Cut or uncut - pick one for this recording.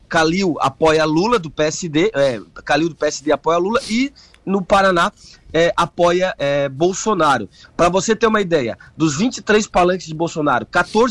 cut